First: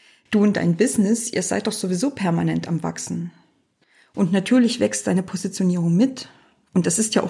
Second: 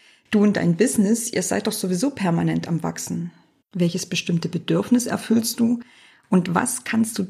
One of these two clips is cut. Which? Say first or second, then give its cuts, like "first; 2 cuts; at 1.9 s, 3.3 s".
second; 1 cut; at 3.6 s